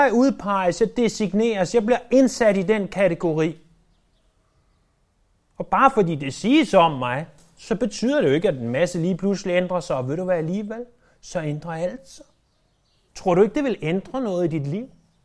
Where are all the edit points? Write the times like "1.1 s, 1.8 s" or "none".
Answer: 13.1 s